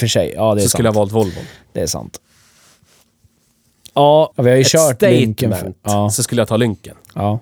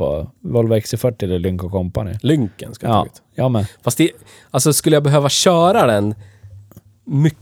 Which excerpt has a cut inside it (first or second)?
first